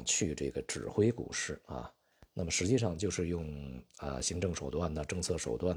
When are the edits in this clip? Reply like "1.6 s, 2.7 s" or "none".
none